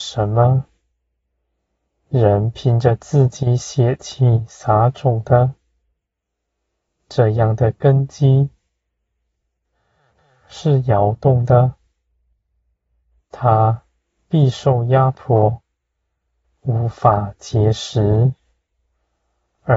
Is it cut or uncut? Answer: uncut